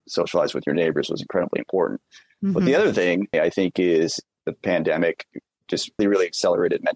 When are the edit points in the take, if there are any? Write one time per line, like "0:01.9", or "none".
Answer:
0:03.3
0:06.0